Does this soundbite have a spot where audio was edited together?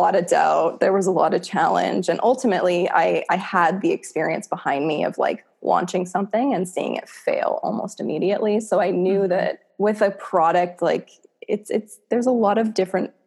no; 0 cuts

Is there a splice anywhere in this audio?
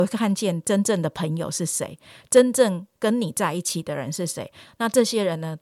yes; 1 cut; at 4.7 s

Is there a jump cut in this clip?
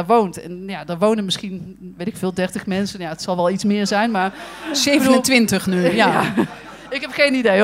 no; 0 cuts

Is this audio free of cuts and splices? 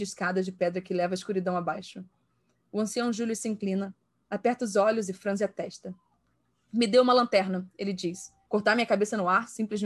no; 1 cut; at 8.5 s

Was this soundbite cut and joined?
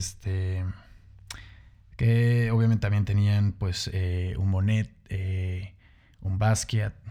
no; 0 cuts

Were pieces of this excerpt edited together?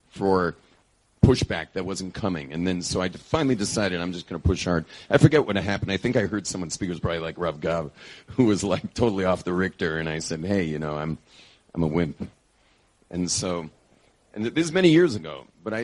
no; 0 cuts

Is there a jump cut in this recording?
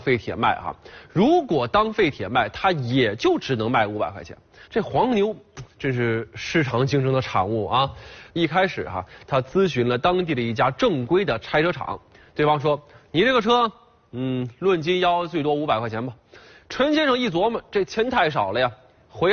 yes; 2 cuts; at 4.6 s, 8.3 s

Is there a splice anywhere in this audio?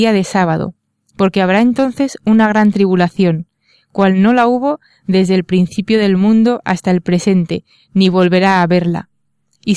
no; 0 cuts

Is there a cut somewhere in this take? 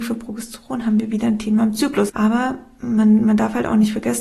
yes; 1 cut; at 2.1 s

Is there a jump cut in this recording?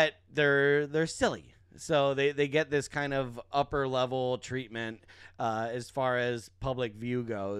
no; 0 cuts

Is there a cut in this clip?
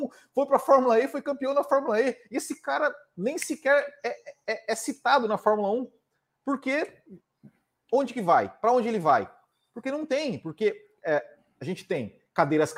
no; 0 cuts

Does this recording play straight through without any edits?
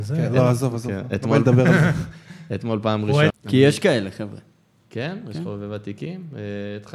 no; 1 cut; at 3.3 s

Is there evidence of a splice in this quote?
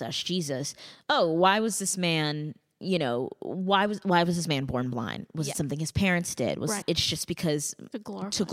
yes; 1 cut; at 6.8 s

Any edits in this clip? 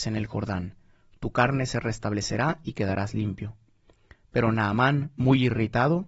no; 0 cuts

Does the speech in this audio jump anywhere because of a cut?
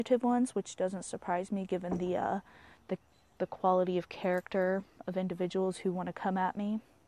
no; 0 cuts

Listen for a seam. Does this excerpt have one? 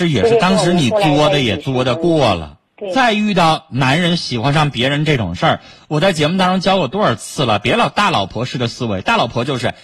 yes; 1 cut; at 2.7 s

